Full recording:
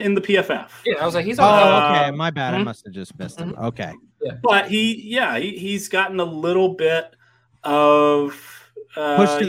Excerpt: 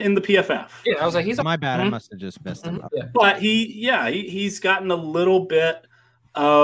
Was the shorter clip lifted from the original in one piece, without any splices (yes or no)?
no